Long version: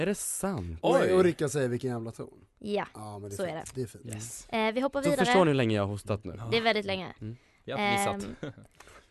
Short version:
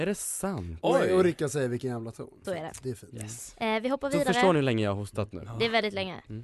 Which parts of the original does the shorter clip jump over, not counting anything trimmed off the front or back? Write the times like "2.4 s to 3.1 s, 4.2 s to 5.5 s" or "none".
2.4 s to 3.4 s